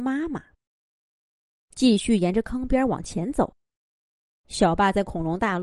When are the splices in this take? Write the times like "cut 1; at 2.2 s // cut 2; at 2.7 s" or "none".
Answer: cut 1; at 4.3 s